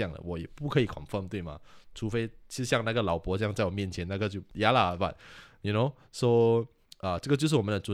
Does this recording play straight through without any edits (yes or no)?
yes